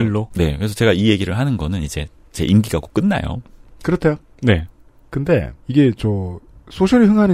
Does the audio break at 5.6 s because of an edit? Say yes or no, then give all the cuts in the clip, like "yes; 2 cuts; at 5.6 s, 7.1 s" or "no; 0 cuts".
yes; 2 cuts; at 4.3 s, 5.6 s